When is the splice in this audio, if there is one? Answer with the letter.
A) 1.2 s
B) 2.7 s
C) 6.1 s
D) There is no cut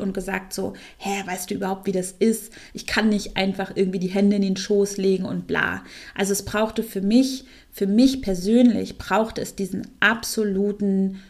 D